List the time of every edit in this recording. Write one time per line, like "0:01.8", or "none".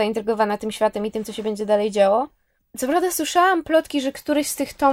none